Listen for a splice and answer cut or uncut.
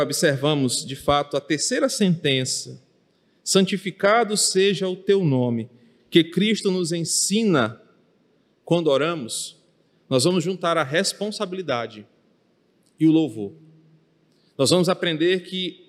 uncut